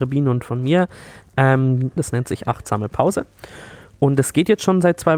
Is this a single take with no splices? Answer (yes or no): no